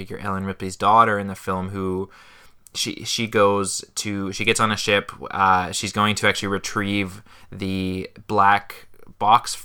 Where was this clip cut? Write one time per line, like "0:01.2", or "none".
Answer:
none